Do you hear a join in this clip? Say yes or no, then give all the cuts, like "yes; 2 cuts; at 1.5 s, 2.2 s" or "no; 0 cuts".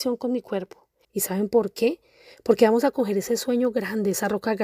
yes; 1 cut; at 1.0 s